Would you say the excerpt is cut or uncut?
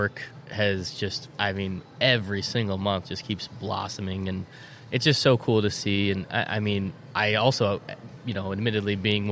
uncut